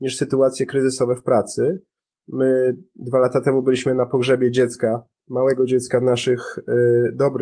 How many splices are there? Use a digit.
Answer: 0